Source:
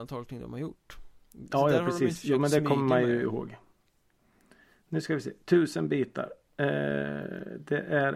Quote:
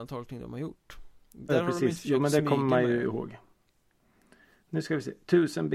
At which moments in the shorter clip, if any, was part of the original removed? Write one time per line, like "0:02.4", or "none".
0:01.5